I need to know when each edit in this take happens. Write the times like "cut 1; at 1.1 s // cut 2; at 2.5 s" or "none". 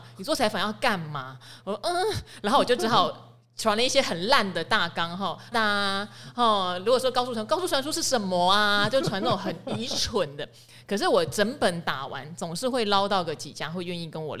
cut 1; at 5.5 s